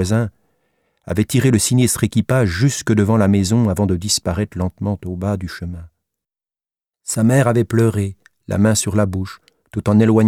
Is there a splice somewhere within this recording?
no; 0 cuts

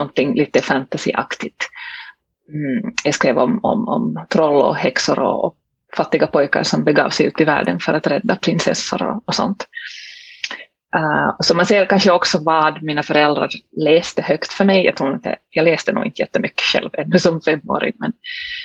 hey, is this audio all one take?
yes; 0 cuts

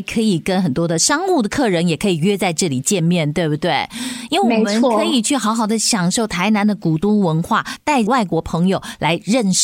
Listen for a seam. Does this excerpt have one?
no; 0 cuts

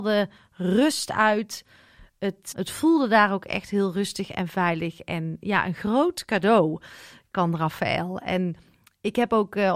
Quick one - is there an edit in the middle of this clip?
yes; 1 cut; at 2.5 s

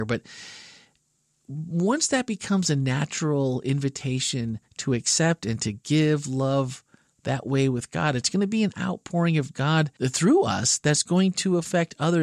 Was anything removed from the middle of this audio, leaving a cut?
yes; 1 cut; at 10.0 s

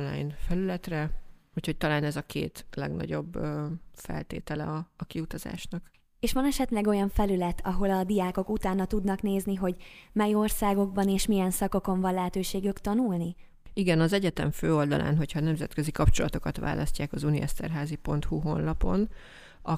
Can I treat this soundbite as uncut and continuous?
yes; 0 cuts

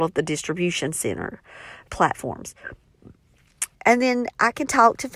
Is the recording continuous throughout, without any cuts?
no; 2 cuts; at 1.9 s, 3.7 s

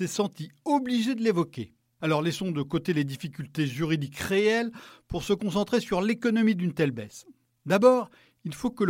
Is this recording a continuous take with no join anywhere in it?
yes; 0 cuts

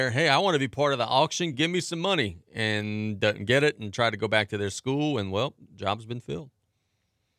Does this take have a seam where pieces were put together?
no; 0 cuts

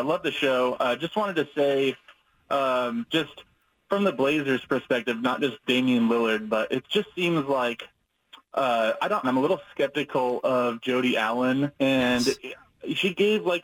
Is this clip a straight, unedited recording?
no; 2 cuts; at 9.2 s, 11.8 s

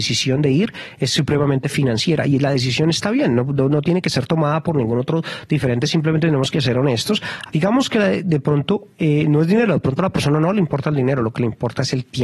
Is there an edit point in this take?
yes; 1 cut; at 7.5 s

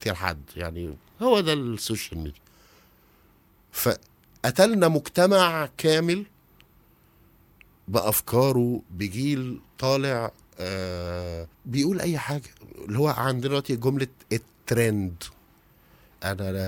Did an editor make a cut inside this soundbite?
yes; 1 cut; at 11.5 s

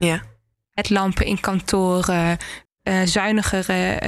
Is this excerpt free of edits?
no; 1 cut; at 2.7 s

